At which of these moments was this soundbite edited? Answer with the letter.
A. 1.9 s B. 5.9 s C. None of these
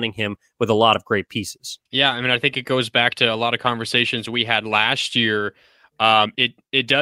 A